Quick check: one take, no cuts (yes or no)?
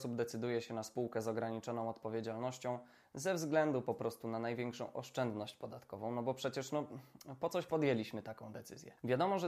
yes